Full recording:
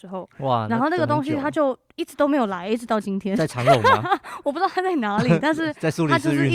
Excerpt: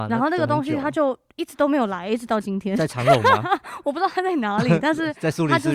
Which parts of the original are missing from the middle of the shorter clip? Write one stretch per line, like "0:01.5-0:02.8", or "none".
none